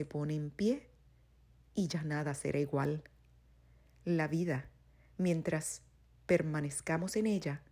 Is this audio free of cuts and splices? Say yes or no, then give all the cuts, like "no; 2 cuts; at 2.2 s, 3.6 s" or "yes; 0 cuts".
yes; 0 cuts